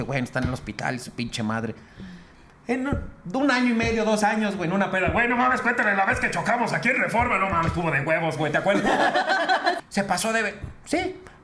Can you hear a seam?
yes; 1 cut; at 9.8 s

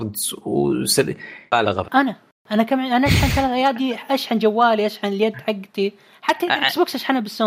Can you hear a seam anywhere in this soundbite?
yes; 1 cut; at 1.8 s

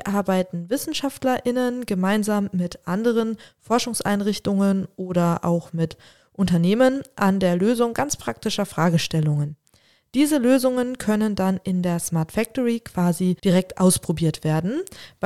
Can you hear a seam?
yes; 1 cut; at 13.4 s

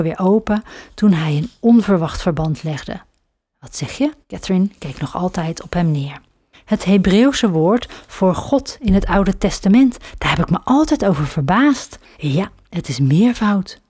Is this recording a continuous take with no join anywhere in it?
no; 3 cuts; at 4.2 s, 6.5 s, 12.1 s

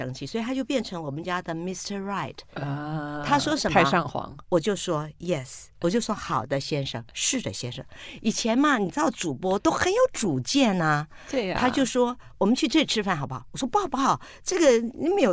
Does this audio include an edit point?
no; 0 cuts

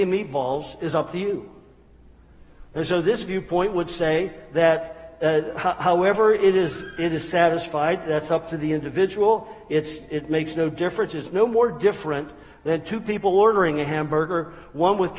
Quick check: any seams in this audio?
no; 0 cuts

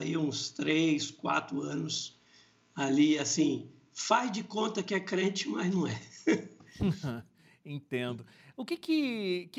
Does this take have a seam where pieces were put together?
no; 0 cuts

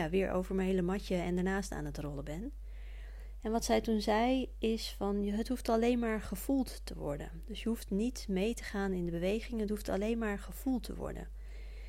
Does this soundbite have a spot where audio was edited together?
no; 0 cuts

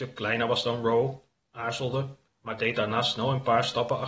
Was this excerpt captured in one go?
no; 1 cut; at 2.2 s

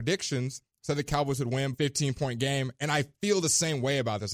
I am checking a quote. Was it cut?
yes; 1 cut; at 1.7 s

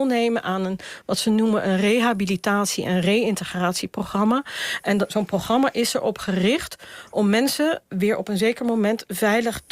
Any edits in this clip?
no; 0 cuts

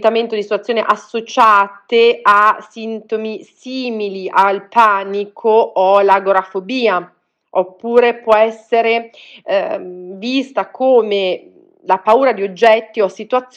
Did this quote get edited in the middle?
no; 0 cuts

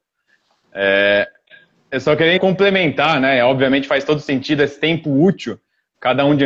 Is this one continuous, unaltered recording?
no; 1 cut; at 2.4 s

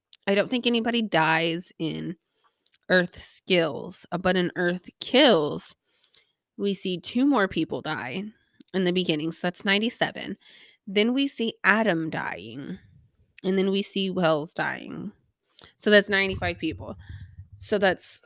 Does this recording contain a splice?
yes; 1 cut; at 13.4 s

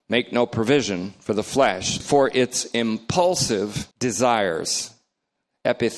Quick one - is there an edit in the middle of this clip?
yes; 2 cuts; at 2.0 s, 3.9 s

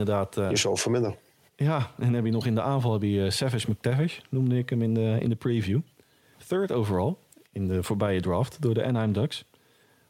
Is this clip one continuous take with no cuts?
yes; 0 cuts

